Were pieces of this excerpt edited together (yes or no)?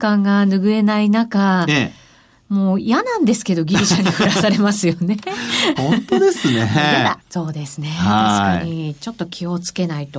yes